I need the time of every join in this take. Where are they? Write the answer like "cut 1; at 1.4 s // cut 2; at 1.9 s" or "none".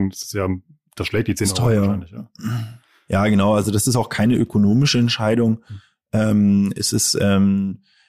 none